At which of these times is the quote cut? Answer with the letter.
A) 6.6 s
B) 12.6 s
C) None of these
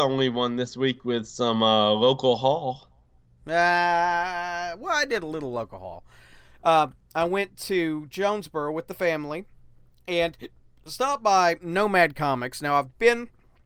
C